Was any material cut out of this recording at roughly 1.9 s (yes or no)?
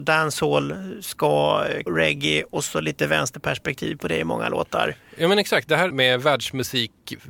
yes